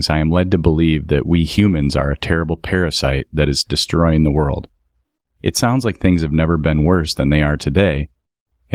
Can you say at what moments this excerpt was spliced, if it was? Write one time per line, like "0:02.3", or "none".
none